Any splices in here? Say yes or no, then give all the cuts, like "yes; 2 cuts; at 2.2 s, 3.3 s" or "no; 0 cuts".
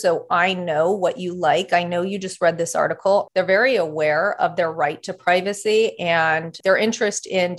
yes; 2 cuts; at 3.3 s, 6.6 s